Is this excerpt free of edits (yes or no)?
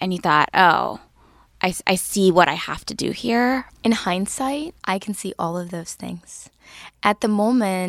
no